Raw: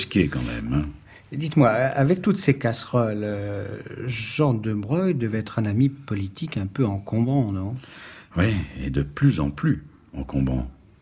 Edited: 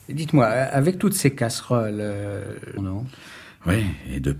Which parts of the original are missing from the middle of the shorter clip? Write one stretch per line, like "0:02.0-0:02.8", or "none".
0:04.0-0:07.5